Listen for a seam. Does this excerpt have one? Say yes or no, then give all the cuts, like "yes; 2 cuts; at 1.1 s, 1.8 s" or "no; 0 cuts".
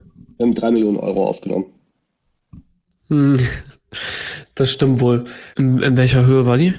yes; 2 cuts; at 3.0 s, 5.5 s